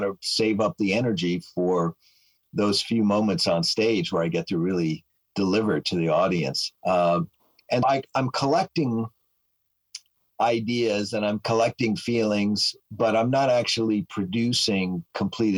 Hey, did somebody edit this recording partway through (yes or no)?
yes